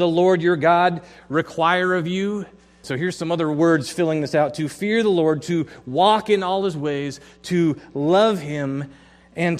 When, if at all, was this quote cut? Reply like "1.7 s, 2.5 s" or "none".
2.8 s